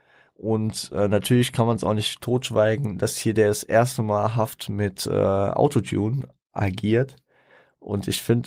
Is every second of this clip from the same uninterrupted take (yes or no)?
yes